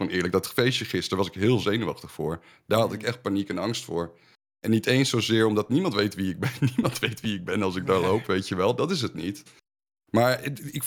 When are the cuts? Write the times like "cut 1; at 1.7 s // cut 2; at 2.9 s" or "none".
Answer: none